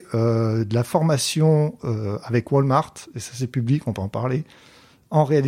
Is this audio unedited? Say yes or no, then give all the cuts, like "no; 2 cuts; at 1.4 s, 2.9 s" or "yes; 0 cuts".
yes; 0 cuts